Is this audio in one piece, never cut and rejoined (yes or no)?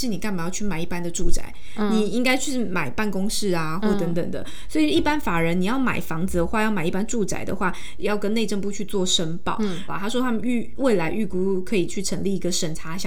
no